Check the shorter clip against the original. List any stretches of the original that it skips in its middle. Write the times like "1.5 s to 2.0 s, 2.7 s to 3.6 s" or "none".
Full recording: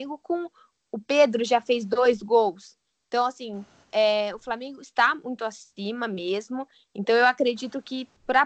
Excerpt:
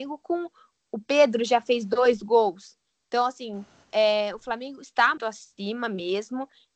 5.2 s to 5.4 s